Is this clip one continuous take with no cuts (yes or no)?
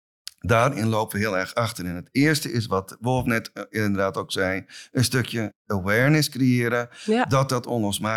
yes